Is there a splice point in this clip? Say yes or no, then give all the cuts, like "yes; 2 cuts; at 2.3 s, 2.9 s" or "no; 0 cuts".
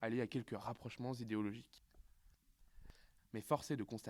yes; 1 cut; at 3.2 s